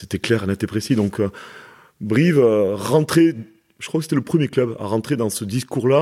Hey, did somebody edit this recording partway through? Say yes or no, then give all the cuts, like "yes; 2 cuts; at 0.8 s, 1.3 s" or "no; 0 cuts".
no; 0 cuts